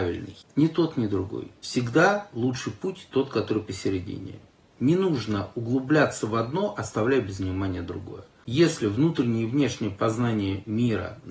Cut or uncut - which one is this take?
uncut